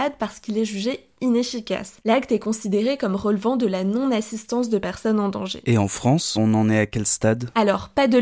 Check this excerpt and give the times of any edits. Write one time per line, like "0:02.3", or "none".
none